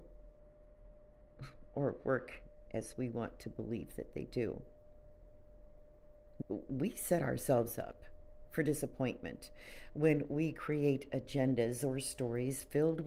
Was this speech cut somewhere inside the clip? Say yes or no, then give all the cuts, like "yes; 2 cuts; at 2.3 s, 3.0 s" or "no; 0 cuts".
yes; 1 cut; at 6.4 s